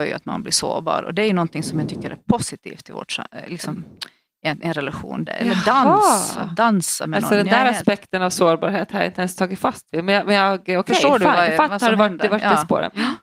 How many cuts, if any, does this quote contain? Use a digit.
1